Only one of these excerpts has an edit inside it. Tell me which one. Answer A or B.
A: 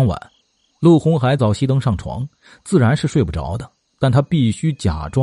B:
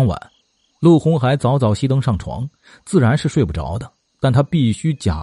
A